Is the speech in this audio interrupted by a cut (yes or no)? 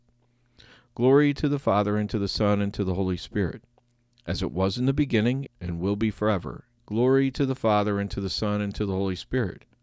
yes